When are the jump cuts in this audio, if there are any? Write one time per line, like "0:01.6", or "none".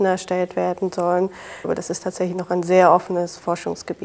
0:01.6

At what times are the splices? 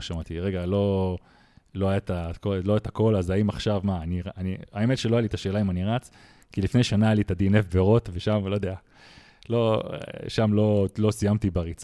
none

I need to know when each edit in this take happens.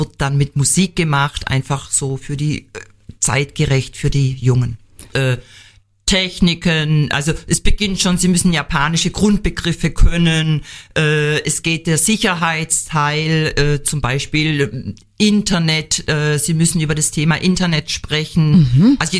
0:05.1

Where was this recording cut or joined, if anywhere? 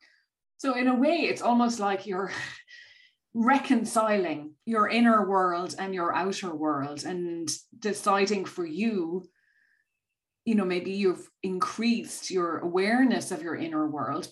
0:04.6

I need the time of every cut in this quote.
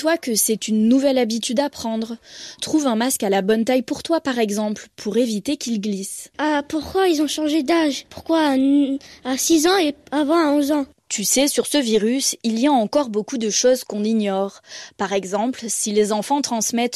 none

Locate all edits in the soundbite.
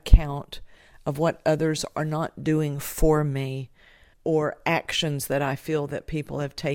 0:04.1

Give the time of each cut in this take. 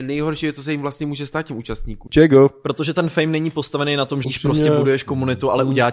0:02.1
0:04.2

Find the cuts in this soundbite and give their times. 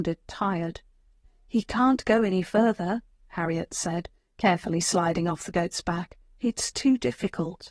0:01.2

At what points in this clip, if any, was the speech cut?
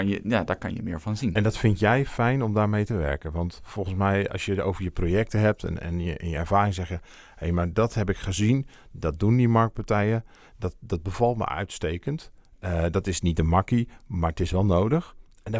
none

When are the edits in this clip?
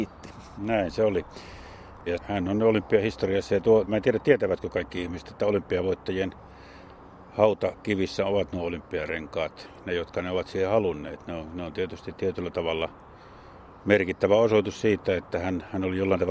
0:02.1
0:03.9

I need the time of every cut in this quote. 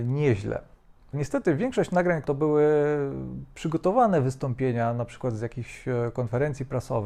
0:01.1
0:02.2

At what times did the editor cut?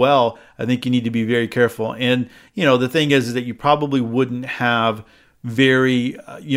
none

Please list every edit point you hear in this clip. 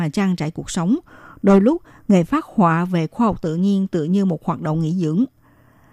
none

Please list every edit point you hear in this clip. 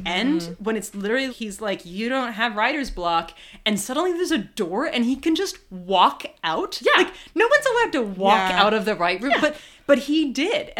0:01.3

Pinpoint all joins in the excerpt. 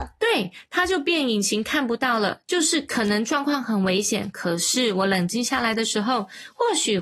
0:02.4

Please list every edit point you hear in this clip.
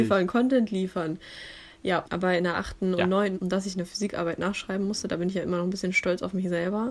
0:02.1
0:03.3

